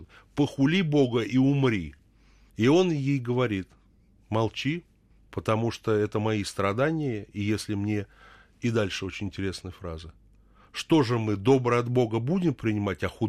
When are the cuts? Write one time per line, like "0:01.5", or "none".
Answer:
none